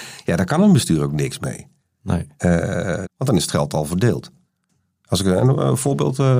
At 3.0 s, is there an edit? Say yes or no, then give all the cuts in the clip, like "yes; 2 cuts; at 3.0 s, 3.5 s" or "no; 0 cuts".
yes; 1 cut; at 3.0 s